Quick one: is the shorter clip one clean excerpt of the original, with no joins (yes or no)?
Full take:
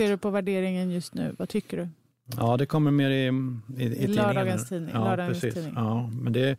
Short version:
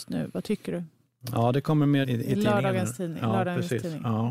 no